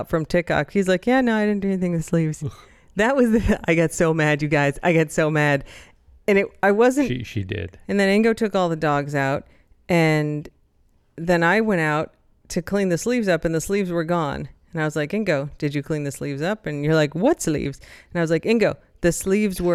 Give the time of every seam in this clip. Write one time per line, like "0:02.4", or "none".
0:07.8